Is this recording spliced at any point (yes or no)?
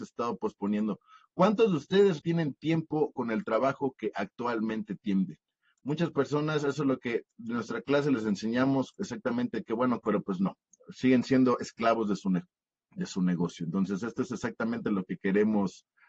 yes